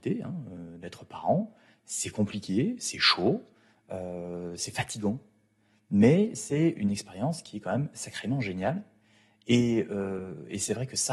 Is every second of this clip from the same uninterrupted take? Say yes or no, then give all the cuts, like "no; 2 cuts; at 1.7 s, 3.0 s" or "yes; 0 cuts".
yes; 0 cuts